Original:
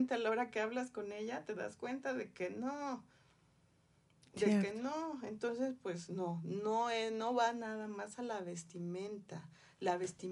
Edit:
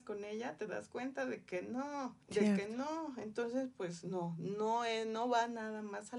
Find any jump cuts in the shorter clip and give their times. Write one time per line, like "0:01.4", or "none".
0:02.2